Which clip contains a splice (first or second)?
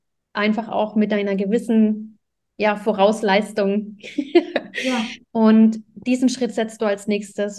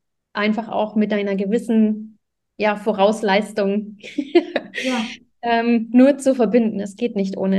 first